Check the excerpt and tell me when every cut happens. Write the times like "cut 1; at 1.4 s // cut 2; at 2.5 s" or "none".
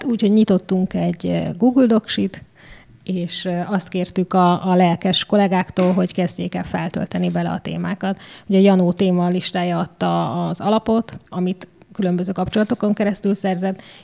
cut 1; at 11.3 s